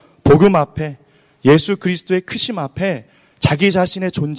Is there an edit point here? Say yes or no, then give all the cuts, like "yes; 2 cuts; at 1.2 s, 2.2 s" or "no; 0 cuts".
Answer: no; 0 cuts